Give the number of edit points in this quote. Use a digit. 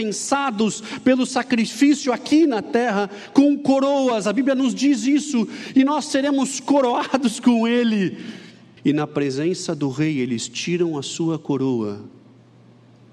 1